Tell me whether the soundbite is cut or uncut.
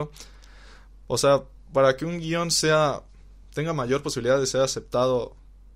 uncut